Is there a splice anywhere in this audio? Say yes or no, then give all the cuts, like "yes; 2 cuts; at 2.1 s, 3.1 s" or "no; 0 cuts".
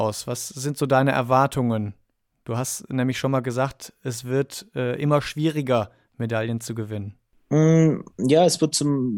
no; 0 cuts